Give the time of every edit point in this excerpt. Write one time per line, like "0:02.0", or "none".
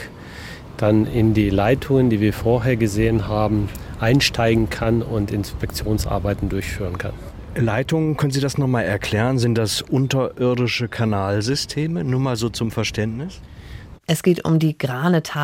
0:14.0